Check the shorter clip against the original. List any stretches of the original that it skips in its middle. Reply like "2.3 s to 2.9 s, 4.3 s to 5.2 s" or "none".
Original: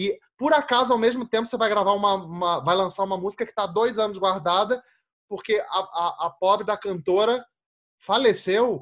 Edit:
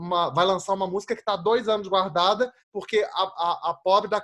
4.9 s to 5.2 s